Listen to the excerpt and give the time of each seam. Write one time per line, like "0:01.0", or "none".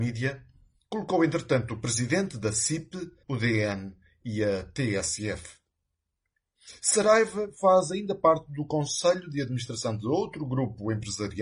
0:03.2